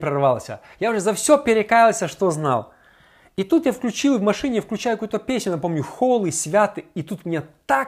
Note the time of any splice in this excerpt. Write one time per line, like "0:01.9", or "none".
none